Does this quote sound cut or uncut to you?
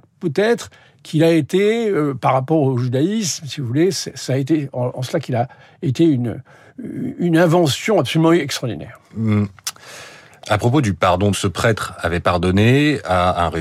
cut